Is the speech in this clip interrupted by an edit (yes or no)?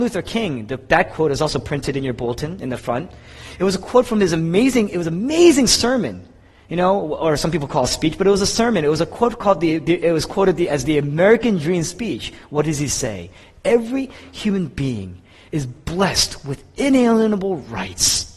no